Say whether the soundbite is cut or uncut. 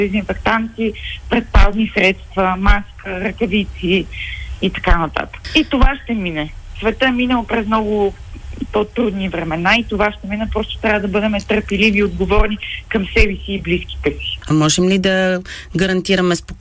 cut